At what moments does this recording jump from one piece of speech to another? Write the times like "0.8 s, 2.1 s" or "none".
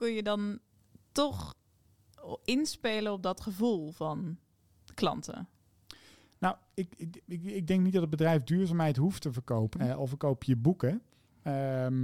9.8 s